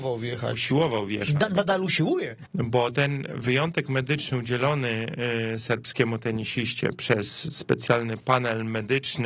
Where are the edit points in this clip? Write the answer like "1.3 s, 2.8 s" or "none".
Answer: 2.5 s